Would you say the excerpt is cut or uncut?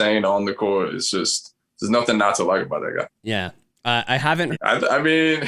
cut